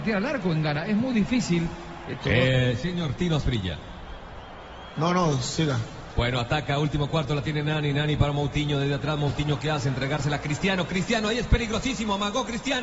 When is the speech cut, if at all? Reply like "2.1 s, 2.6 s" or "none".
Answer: 2.2 s